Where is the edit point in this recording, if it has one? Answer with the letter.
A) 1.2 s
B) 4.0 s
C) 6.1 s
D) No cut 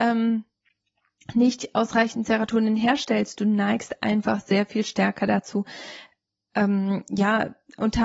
D